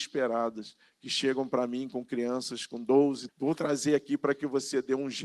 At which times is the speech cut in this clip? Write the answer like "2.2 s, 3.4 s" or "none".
3.3 s